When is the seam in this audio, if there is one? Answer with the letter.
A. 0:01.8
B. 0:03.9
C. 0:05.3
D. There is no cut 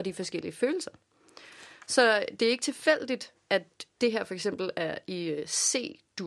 B